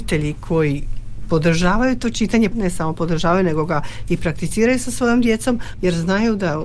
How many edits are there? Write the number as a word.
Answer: two